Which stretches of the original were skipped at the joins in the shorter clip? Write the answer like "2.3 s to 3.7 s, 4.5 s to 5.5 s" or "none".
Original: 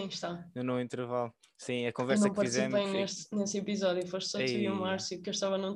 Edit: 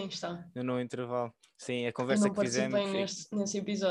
none